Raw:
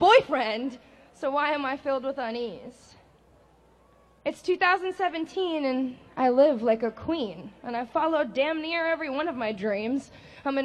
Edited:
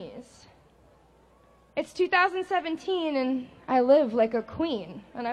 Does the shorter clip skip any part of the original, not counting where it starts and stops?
no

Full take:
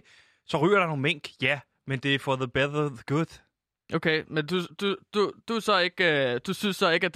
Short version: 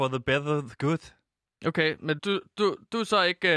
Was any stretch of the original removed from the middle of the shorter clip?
yes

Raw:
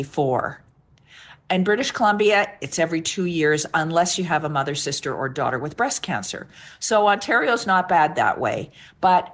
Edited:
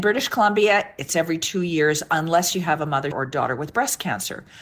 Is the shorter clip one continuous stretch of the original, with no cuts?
no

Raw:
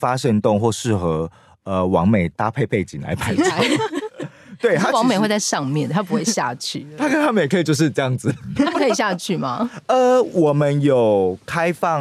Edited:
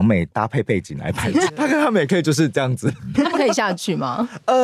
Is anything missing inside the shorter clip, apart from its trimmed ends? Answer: yes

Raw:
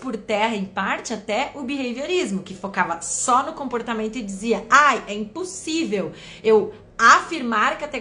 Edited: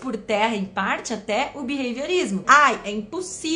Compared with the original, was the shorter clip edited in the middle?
yes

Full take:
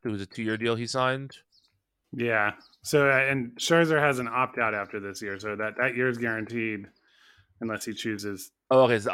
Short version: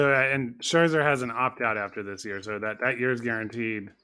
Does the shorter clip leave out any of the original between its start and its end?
no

